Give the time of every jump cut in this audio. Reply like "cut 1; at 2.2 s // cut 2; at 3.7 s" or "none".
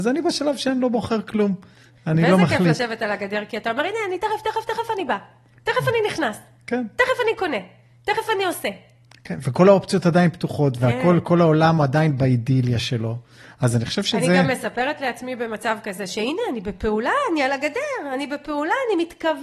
none